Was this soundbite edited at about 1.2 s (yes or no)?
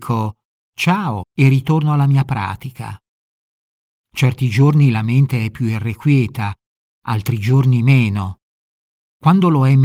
yes